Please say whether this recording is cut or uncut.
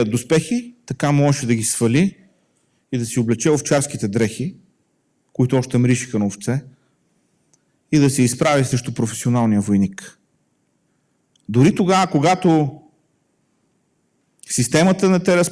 uncut